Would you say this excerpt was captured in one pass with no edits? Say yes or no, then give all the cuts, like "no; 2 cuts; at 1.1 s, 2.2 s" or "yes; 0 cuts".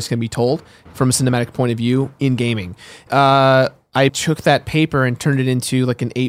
no; 2 cuts; at 3.1 s, 4.1 s